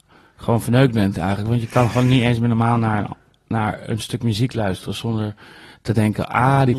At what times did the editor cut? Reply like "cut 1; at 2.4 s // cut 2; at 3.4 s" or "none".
none